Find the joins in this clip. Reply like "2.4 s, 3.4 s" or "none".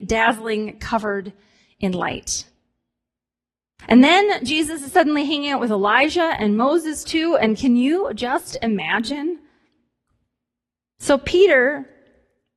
none